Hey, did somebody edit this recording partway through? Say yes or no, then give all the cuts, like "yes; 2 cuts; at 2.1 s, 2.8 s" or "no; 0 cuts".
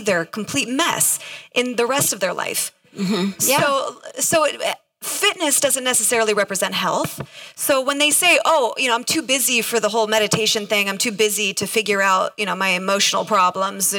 no; 0 cuts